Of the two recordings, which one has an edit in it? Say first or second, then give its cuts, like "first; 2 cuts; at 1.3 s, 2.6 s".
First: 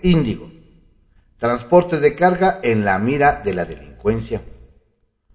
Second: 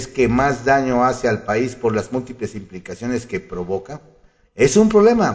second; 1 cut; at 4.5 s